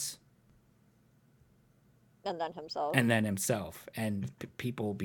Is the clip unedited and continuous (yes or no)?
yes